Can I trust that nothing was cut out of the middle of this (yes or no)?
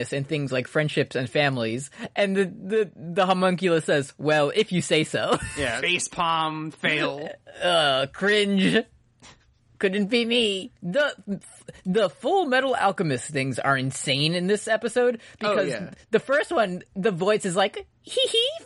no